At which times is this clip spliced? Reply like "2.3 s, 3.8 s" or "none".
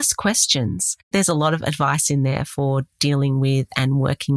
1.1 s